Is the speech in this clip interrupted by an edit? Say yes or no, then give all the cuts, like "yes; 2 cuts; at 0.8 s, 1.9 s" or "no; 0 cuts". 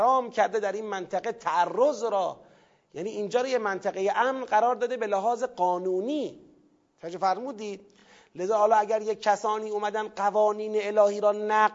no; 0 cuts